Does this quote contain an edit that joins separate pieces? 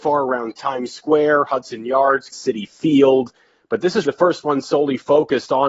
yes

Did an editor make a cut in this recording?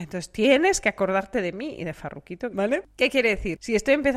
yes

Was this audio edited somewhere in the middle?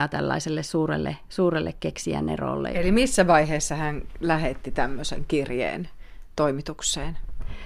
yes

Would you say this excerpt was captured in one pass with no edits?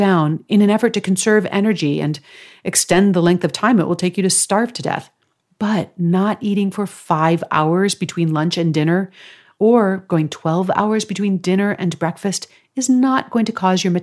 yes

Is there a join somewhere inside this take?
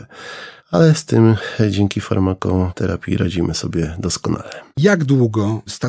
no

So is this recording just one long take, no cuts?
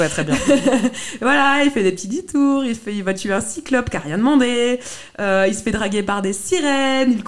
yes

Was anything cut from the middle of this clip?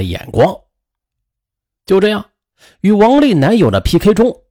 no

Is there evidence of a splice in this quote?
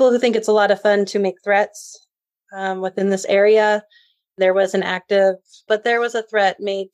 yes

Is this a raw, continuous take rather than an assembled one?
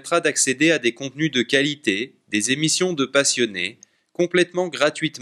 yes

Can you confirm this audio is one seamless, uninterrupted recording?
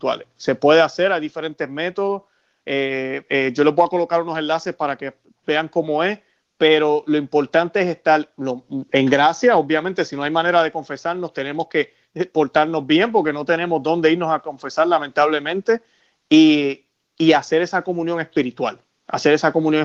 yes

